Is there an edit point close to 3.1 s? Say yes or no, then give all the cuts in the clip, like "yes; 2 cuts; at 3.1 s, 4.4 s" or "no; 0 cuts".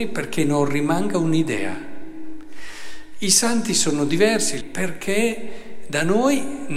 no; 1 cut; at 4.6 s